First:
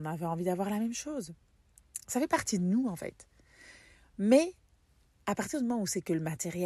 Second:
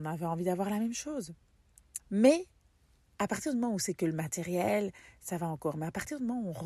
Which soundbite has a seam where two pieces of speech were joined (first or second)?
second